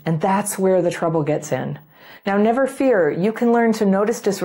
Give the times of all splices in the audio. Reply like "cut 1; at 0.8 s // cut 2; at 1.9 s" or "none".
cut 1; at 2.2 s